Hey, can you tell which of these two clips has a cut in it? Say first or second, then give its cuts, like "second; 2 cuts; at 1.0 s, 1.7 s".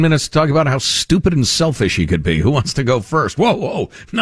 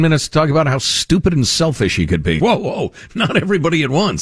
second; 1 cut; at 2.4 s